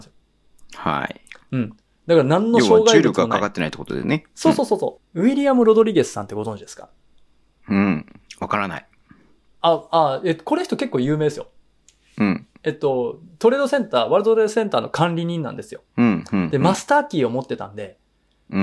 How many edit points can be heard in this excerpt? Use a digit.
2